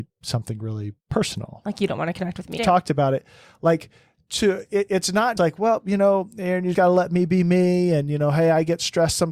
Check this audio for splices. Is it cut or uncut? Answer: cut